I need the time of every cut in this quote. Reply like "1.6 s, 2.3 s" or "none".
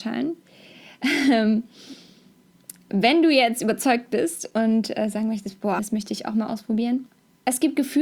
5.8 s